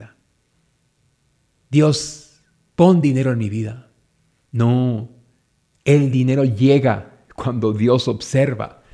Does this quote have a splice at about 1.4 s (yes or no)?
no